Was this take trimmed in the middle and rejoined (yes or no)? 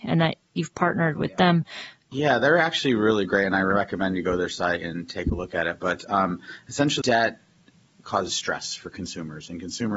yes